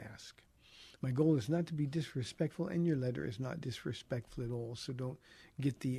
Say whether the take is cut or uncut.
uncut